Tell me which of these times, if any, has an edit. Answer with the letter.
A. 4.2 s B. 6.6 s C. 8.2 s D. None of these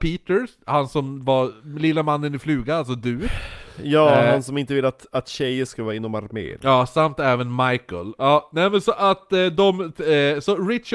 C